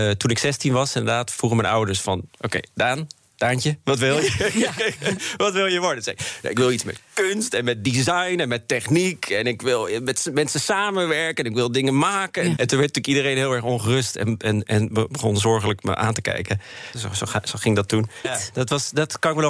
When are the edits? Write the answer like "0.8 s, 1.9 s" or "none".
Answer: 12.6 s, 16.9 s, 18.2 s